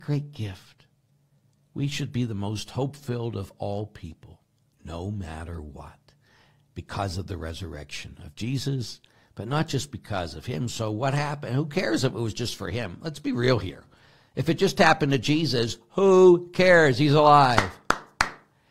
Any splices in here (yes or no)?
no